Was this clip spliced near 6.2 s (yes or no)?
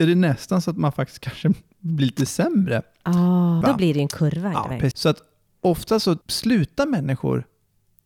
yes